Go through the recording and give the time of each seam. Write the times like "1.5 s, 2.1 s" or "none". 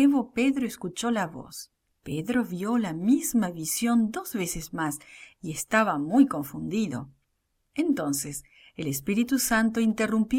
2.0 s